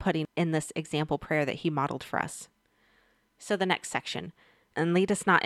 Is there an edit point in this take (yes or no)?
no